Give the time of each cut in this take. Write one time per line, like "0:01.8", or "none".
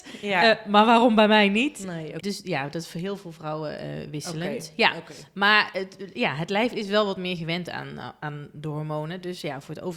0:02.2